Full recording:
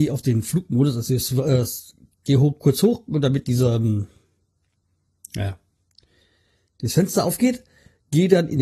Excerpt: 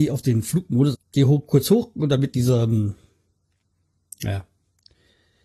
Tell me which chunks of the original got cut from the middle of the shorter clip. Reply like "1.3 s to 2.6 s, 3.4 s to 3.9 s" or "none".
0.9 s to 2.1 s